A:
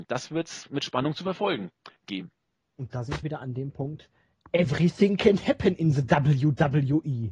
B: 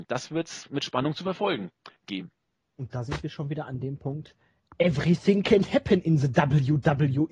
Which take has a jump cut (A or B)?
A